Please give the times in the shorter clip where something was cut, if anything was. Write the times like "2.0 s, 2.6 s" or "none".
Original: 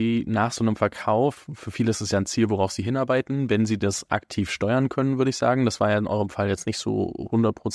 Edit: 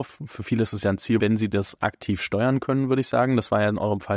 1.2 s